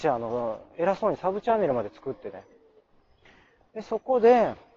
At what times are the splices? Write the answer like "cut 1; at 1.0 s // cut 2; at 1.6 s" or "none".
none